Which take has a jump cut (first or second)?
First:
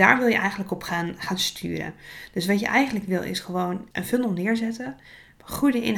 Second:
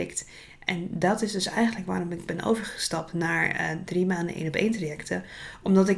first